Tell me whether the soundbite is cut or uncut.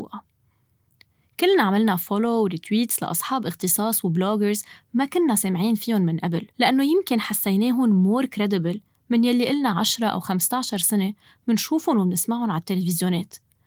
cut